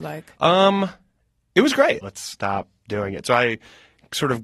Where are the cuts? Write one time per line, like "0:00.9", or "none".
0:02.0